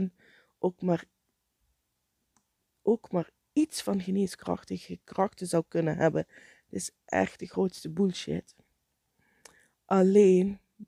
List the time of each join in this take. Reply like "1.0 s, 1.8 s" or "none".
none